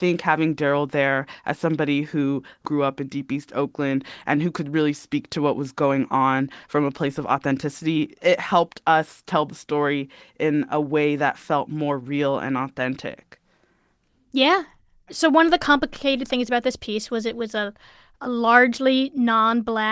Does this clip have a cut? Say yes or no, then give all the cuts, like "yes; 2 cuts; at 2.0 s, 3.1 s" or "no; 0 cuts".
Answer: no; 0 cuts